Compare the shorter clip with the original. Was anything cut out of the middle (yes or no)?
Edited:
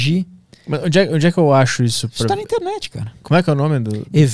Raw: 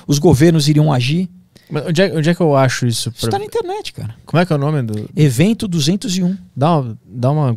no